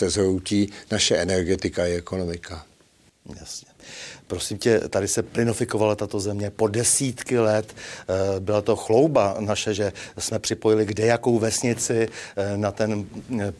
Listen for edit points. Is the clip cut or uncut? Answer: uncut